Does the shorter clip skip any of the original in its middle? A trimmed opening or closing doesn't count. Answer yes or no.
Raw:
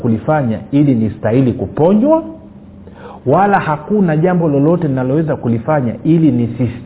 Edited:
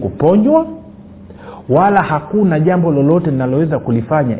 no